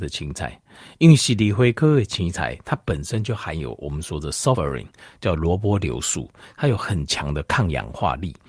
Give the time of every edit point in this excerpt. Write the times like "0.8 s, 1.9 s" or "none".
4.5 s